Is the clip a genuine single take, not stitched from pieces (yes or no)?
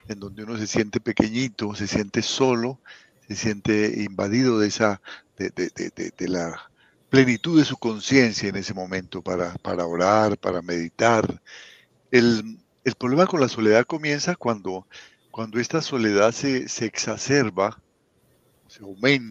no